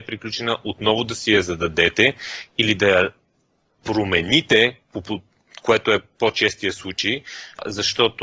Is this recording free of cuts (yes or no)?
yes